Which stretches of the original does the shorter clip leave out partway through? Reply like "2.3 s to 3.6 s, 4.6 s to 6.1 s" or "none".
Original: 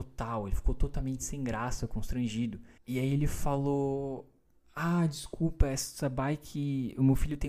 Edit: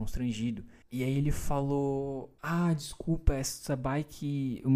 4.3 s to 4.7 s